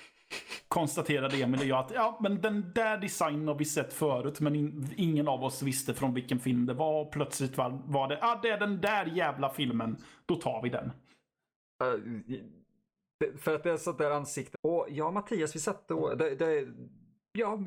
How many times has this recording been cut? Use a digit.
1